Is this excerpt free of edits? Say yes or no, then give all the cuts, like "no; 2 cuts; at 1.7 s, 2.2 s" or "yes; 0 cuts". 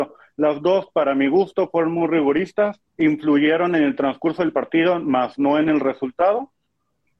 no; 1 cut; at 2.9 s